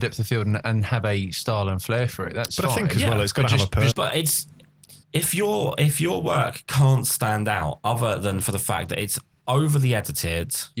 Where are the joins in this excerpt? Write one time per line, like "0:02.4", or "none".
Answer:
0:03.9
0:05.0